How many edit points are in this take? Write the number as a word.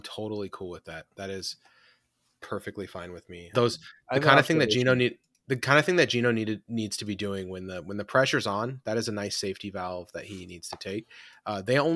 one